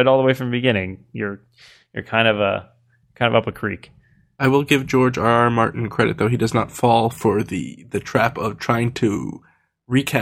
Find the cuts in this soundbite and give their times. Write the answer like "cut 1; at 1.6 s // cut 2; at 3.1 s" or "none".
none